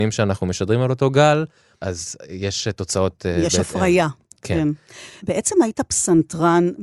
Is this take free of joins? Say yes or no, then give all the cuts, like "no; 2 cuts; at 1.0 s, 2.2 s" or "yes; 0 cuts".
yes; 0 cuts